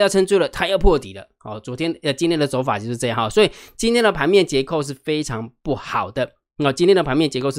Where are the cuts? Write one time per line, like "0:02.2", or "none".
none